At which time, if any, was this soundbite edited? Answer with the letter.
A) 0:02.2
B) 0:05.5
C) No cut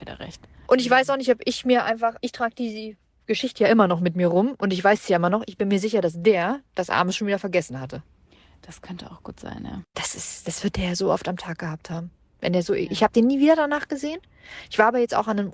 A